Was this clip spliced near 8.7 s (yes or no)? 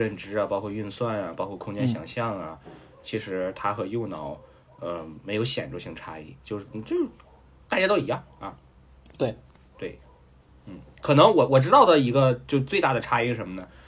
no